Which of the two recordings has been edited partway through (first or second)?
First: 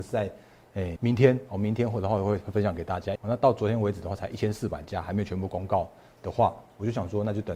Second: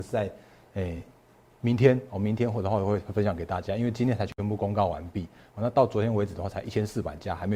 first